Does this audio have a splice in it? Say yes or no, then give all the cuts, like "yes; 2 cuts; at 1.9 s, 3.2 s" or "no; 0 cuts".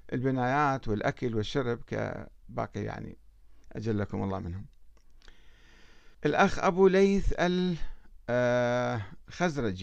yes; 2 cuts; at 3.6 s, 6.1 s